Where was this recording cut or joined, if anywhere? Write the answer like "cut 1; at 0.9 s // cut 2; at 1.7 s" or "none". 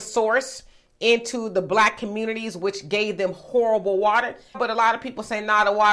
cut 1; at 4.5 s